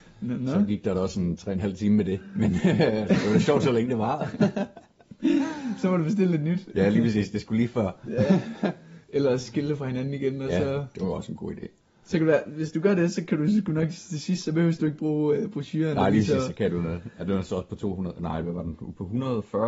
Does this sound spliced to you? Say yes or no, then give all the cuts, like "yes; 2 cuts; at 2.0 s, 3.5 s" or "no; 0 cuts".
no; 0 cuts